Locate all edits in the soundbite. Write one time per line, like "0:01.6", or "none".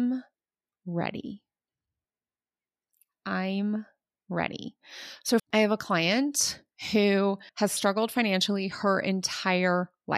0:05.4
0:07.5